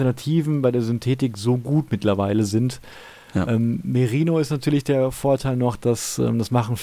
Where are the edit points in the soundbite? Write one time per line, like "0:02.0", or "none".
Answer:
none